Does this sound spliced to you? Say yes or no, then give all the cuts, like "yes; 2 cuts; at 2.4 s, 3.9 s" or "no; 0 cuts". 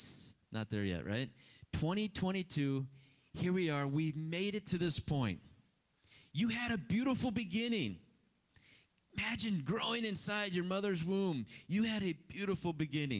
no; 0 cuts